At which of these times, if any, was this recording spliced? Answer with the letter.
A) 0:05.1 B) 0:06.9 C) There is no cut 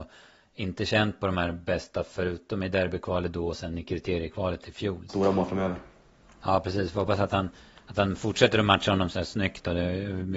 A